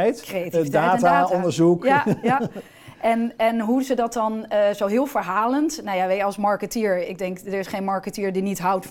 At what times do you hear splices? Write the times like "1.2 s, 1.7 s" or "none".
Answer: none